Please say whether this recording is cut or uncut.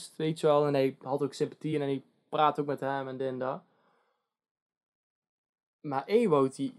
uncut